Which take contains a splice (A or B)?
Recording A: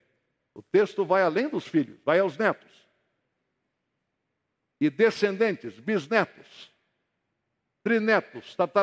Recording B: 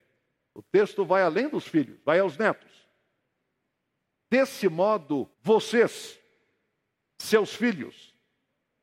B